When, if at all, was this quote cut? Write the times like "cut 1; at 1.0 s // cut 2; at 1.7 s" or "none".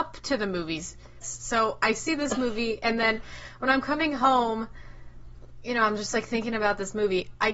cut 1; at 1.2 s